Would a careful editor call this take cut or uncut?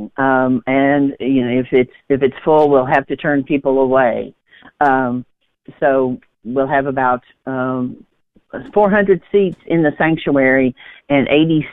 uncut